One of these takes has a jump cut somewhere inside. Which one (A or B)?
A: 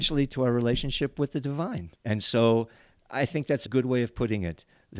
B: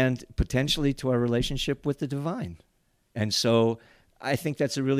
A